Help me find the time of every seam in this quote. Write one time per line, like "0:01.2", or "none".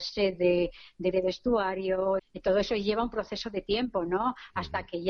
0:01.1
0:02.2

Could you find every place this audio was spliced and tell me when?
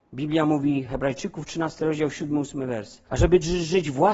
0:03.1

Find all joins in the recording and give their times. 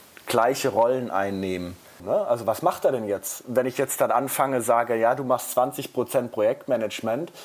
0:02.0

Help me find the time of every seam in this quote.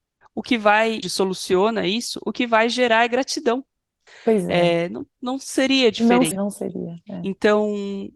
0:01.0
0:04.1
0:06.3

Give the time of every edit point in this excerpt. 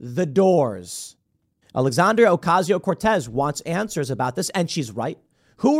0:01.6

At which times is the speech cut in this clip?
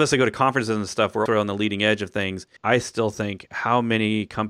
0:01.3
0:02.6

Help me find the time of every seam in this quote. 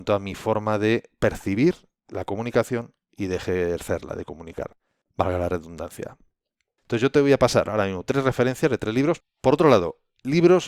0:06.8
0:09.2

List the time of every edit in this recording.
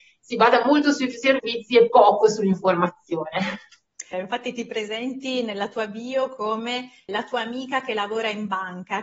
0:04.1
0:07.1

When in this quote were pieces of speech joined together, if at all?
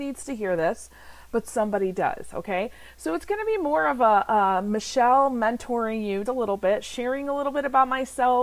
0:06.3

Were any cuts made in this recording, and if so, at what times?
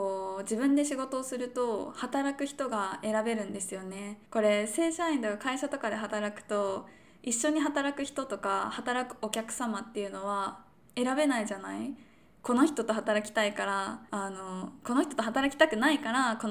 0:04.3
0:14.1

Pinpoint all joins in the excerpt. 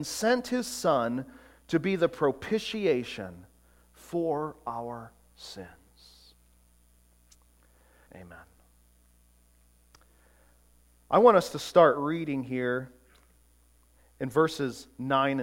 0:08.1

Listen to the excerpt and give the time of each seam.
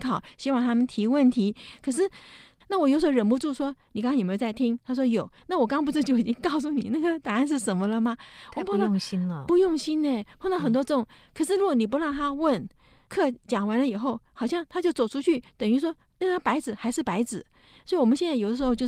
0:02.6

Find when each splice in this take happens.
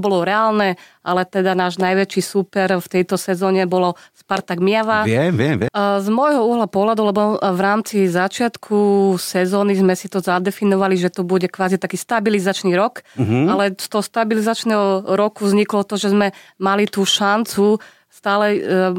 0:05.7

